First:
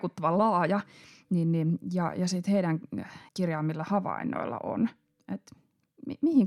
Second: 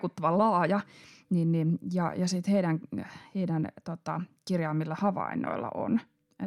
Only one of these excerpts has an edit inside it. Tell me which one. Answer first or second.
first